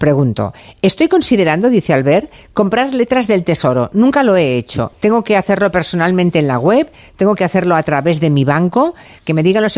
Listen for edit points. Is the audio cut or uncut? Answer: cut